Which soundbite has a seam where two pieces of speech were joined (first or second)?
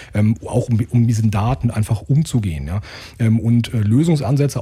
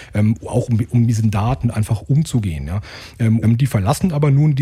second